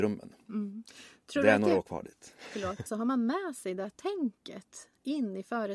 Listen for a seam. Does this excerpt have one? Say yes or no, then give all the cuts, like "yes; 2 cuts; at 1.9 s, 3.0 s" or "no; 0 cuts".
yes; 1 cut; at 2.9 s